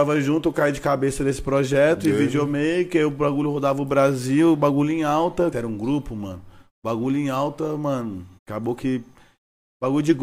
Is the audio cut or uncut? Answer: cut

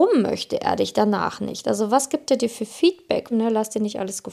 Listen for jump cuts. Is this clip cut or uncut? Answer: cut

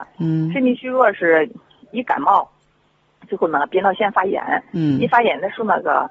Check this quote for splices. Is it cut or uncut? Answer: cut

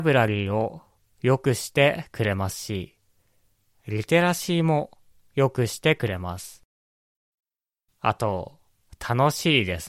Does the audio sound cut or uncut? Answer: cut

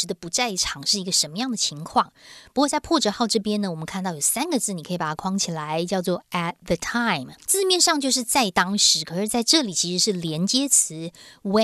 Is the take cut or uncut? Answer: cut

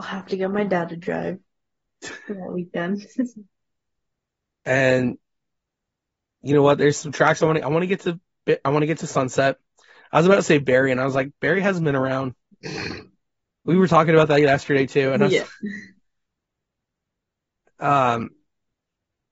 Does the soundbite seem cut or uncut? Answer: uncut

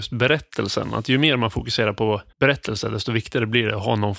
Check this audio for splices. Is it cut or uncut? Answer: cut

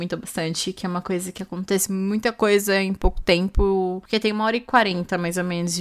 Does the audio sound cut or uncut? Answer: uncut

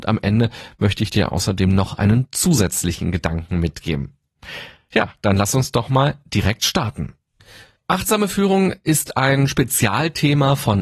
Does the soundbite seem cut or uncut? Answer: uncut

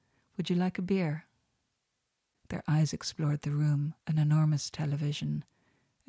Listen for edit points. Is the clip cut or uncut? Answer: cut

